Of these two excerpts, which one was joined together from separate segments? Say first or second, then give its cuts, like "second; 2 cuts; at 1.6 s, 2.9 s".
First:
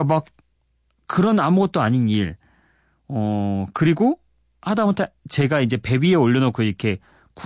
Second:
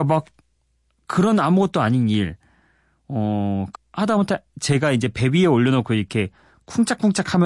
second; 1 cut; at 3.7 s